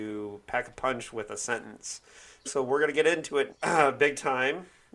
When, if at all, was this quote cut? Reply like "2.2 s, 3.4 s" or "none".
2.4 s, 3.5 s